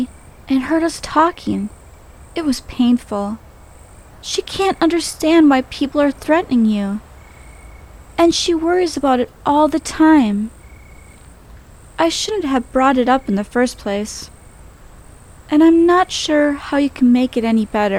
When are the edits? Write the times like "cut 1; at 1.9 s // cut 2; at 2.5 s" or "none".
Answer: none